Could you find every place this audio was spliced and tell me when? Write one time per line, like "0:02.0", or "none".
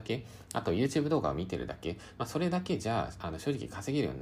none